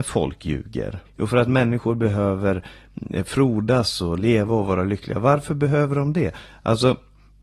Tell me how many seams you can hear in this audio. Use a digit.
1